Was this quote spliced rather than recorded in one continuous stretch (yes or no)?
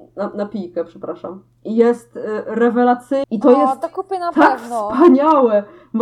yes